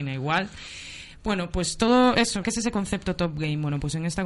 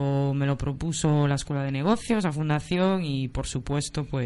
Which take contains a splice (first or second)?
first